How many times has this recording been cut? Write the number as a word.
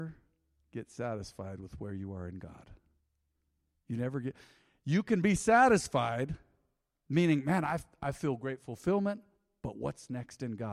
zero